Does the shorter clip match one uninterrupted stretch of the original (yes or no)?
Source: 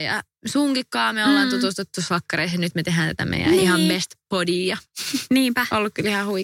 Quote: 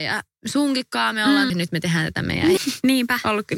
no